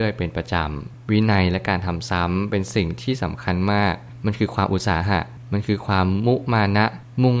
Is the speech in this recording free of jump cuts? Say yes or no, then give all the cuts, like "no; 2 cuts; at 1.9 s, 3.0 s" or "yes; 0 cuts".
yes; 0 cuts